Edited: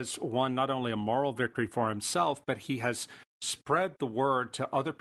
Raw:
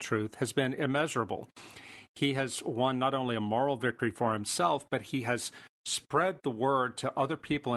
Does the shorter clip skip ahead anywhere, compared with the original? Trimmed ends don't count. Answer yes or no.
no